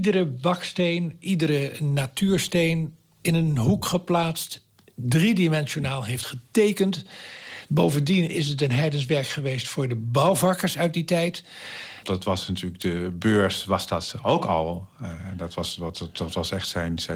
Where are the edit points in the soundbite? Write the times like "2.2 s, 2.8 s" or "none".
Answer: 7.7 s, 12.0 s